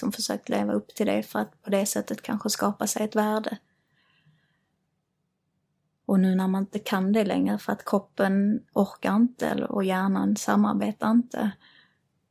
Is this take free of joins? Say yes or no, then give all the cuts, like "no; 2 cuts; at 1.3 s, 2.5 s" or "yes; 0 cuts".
yes; 0 cuts